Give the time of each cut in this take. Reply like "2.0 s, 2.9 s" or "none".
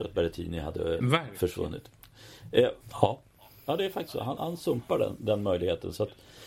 2.8 s, 4.4 s